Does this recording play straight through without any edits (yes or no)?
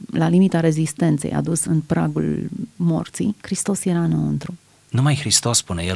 no